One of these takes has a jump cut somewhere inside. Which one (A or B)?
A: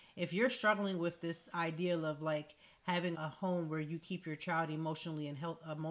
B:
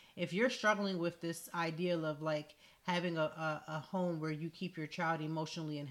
A